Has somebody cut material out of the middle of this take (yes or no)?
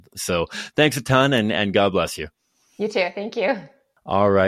no